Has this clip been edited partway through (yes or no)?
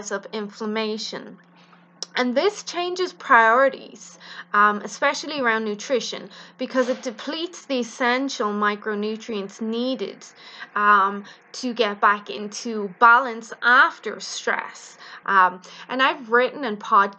yes